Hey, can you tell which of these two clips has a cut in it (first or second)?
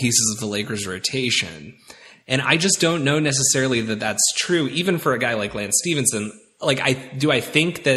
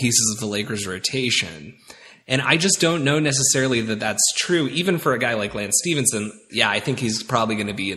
second